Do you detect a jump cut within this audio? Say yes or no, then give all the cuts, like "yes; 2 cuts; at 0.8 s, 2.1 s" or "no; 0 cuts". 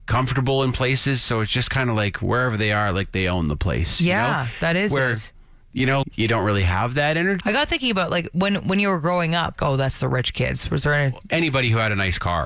yes; 3 cuts; at 6.0 s, 7.4 s, 9.6 s